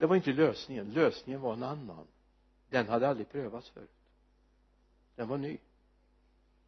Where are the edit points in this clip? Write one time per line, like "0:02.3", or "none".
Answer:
none